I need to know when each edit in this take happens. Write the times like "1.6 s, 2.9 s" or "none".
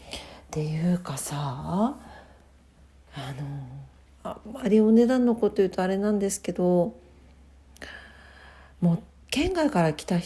none